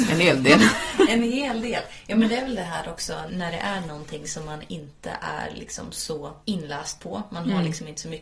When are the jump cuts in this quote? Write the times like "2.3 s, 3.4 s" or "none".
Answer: 3.3 s, 6.4 s

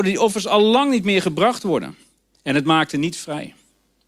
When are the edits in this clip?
2.3 s

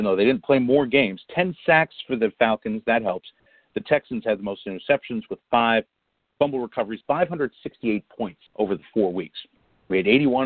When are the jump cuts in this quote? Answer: 7.0 s, 8.5 s

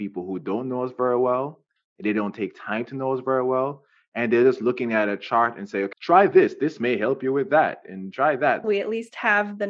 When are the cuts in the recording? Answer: 5.9 s, 8.6 s

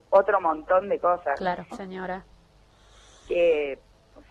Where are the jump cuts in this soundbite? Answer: 1.7 s

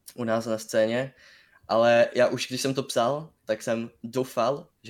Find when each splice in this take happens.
none

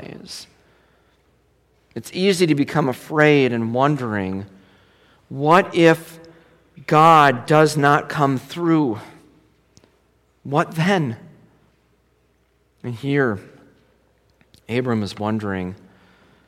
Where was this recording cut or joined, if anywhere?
none

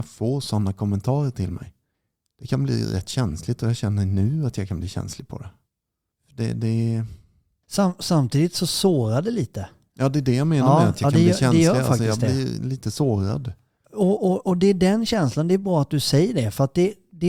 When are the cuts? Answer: none

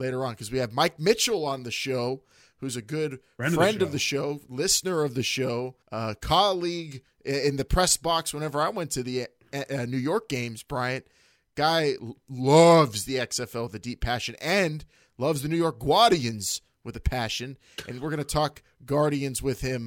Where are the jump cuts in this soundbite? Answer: 5.8 s

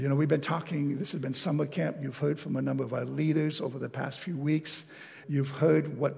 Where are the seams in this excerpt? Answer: 5.2 s

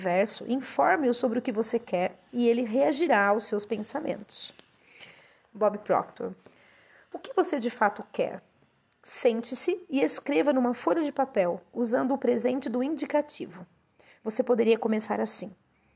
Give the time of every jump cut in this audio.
none

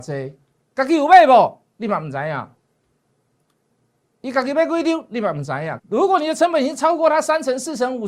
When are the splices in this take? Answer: 5.8 s

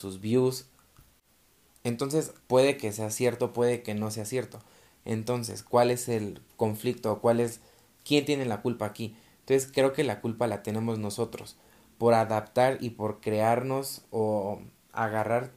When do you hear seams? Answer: 2.4 s

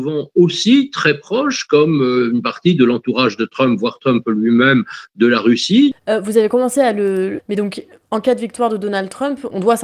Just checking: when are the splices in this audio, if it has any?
5.9 s, 7.4 s

